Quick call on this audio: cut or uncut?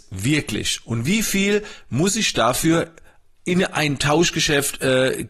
uncut